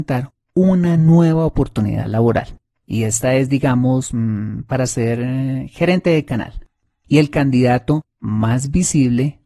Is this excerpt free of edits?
yes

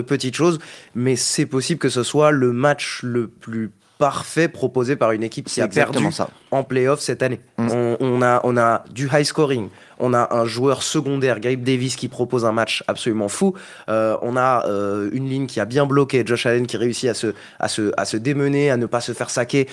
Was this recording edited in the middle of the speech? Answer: no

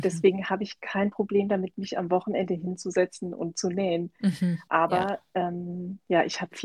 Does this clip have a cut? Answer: yes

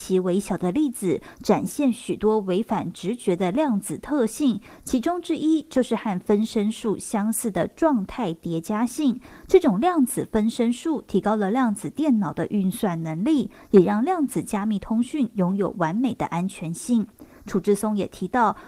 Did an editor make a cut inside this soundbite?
no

